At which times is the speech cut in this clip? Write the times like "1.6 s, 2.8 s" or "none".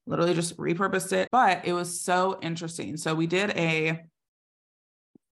1.3 s